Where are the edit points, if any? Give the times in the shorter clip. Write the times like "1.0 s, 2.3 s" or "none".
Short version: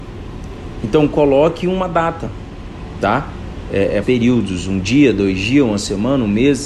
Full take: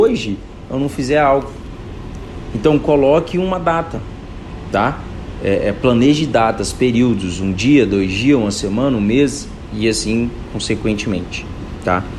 4.0 s